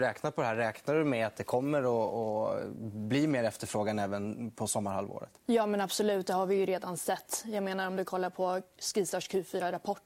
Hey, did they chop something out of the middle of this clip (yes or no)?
no